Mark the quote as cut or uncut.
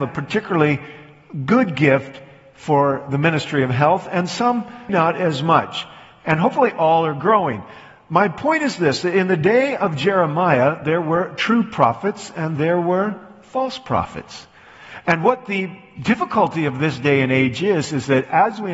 cut